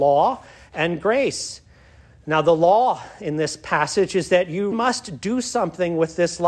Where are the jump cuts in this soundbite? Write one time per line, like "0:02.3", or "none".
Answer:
0:04.7